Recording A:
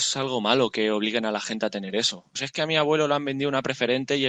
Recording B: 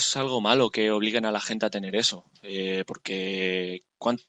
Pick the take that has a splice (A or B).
A